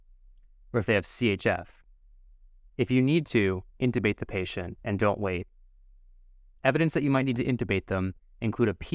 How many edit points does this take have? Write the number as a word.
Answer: zero